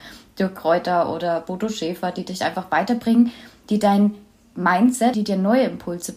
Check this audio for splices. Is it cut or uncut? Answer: cut